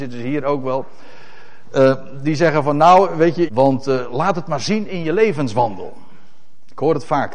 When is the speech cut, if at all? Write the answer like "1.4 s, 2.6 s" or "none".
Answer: 3.5 s